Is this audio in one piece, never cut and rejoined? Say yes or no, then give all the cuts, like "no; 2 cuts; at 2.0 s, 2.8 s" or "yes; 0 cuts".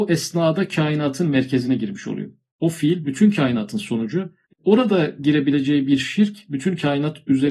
yes; 0 cuts